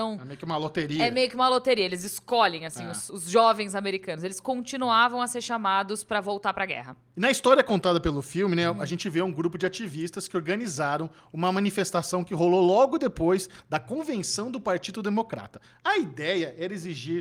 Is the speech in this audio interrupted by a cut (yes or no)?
yes